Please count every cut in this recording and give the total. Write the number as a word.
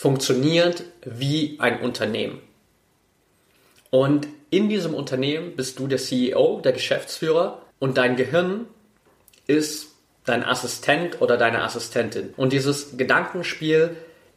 two